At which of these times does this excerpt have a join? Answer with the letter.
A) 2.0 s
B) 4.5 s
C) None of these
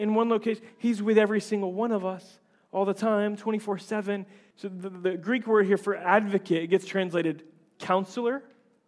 B